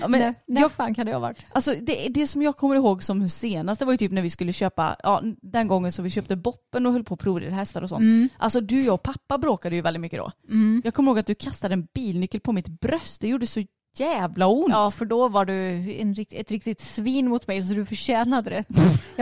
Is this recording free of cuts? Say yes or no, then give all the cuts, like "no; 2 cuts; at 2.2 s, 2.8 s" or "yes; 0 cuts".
yes; 0 cuts